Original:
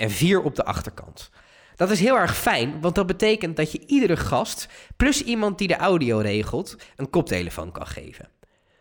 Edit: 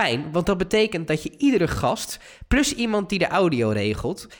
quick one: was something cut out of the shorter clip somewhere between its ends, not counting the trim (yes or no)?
no